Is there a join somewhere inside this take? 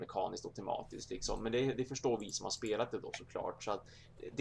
no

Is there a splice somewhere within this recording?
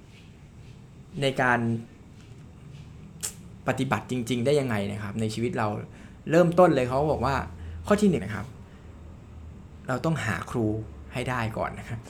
yes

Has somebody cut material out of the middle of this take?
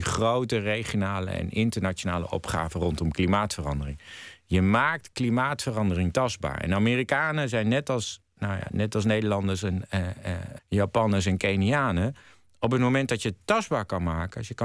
yes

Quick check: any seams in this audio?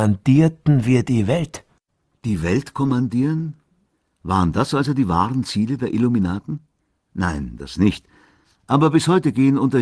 no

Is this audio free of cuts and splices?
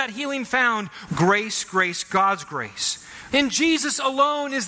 no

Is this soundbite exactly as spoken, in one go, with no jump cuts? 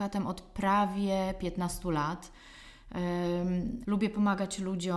no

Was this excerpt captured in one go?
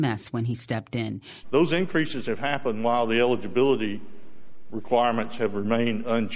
no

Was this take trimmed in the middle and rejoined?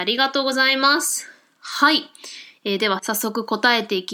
no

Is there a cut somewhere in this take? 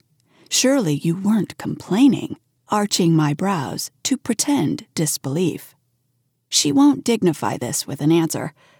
yes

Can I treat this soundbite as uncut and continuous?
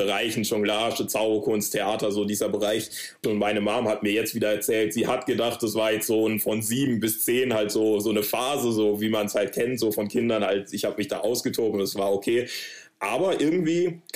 no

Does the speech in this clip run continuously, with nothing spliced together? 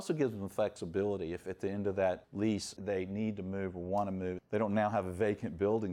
no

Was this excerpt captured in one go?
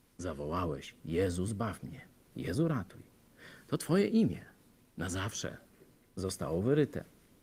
yes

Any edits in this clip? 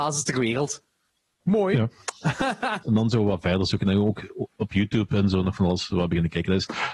yes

